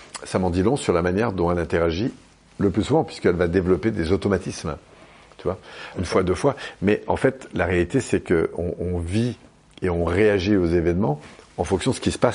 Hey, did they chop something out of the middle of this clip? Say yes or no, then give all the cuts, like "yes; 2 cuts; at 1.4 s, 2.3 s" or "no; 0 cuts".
yes; 1 cut; at 5.9 s